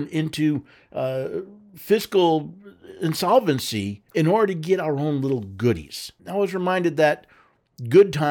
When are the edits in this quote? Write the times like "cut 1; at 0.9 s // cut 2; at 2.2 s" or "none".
cut 1; at 4.1 s // cut 2; at 6.2 s